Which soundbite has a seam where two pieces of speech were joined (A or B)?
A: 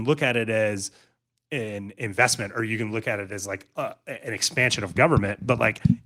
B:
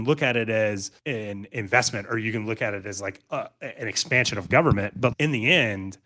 B